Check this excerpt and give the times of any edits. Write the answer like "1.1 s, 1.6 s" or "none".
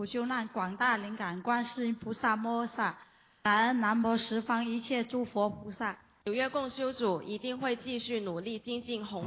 6.2 s